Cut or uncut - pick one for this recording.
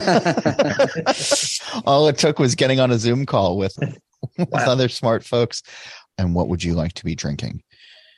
cut